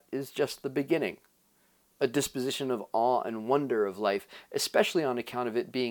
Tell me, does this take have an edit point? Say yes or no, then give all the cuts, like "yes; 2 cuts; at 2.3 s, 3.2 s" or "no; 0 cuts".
no; 0 cuts